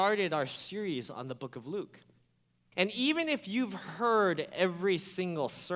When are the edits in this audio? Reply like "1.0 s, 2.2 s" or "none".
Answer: 2.7 s